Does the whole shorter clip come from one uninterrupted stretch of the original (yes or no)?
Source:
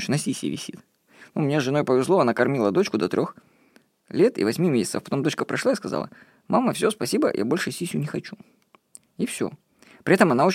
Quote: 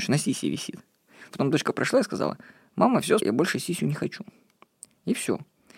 no